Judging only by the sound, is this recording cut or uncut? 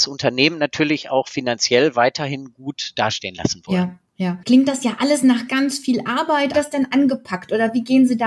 cut